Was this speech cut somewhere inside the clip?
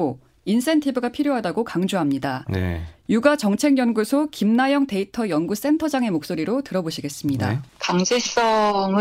yes; 1 cut; at 7.7 s

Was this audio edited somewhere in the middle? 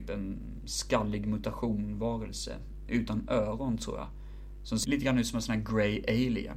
yes; 1 cut; at 4.8 s

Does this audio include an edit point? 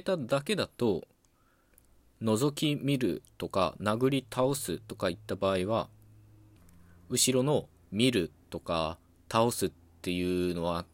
no; 0 cuts

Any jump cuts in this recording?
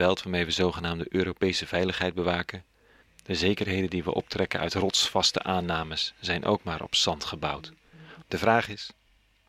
yes; 2 cuts; at 3.0 s, 8.2 s

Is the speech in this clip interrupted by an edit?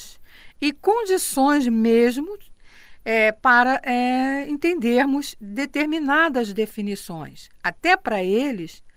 no; 0 cuts

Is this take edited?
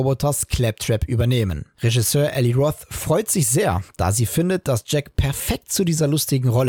no; 0 cuts

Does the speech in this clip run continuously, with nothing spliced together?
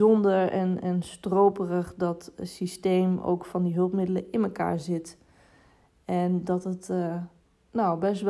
yes; 0 cuts

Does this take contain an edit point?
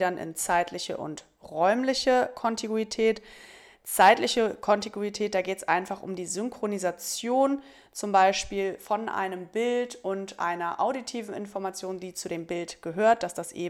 no; 0 cuts

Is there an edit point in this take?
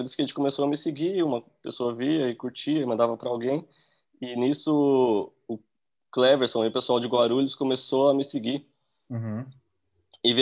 no; 0 cuts

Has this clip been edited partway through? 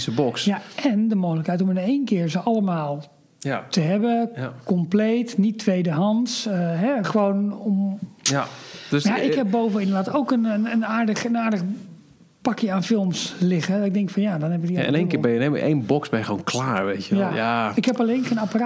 no; 0 cuts

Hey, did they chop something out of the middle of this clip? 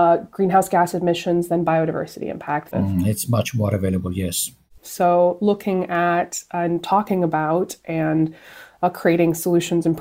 yes; 2 cuts; at 2.7 s, 4.8 s

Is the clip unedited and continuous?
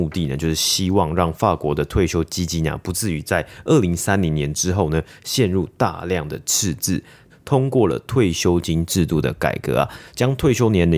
no; 1 cut; at 7.3 s

